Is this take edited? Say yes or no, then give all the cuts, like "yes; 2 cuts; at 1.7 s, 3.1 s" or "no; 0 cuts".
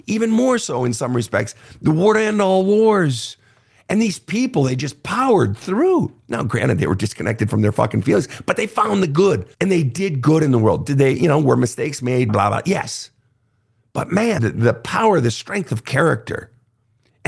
yes; 3 cuts; at 9.5 s, 12.3 s, 14.4 s